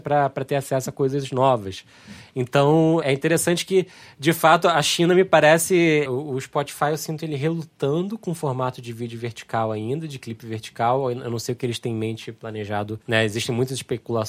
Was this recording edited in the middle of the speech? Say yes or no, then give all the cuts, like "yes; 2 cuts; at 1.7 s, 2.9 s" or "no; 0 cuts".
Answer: yes; 3 cuts; at 3.0 s, 6.1 s, 13.0 s